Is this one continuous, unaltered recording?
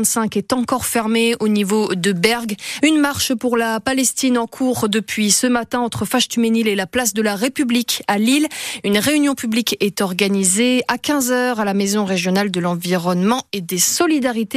no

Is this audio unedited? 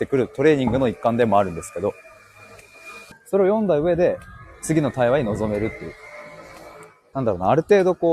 no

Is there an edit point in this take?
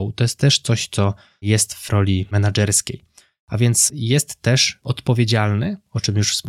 no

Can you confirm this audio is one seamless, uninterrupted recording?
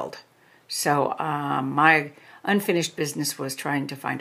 yes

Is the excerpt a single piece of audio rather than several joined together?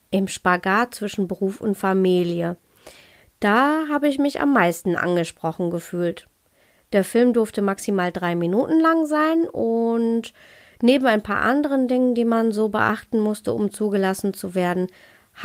yes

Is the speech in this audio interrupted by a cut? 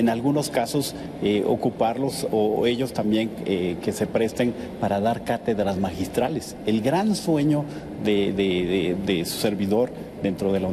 no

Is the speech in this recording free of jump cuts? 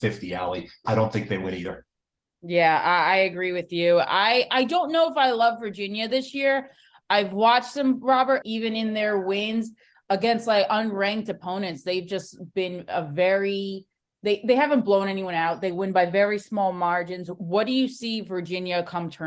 no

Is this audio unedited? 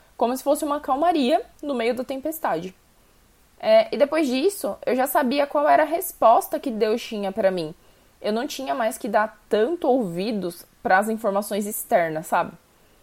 yes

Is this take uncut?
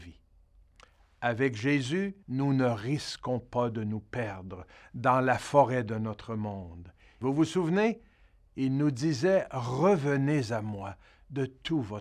no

